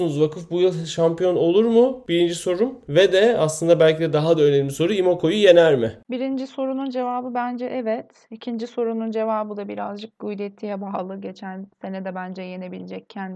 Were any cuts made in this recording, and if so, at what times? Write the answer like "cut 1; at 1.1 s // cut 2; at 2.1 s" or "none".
none